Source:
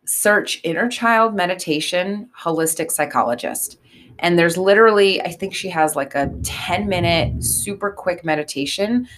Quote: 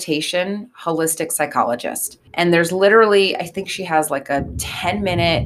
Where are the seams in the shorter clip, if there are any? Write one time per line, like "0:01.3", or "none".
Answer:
0:02.3